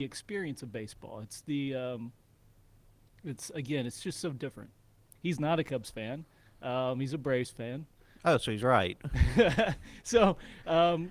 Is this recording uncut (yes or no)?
no